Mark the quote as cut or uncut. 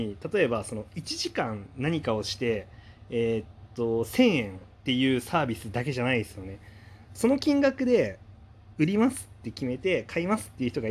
cut